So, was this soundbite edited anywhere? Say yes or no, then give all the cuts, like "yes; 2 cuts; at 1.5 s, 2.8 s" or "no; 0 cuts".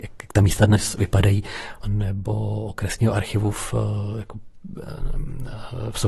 yes; 1 cut; at 1.8 s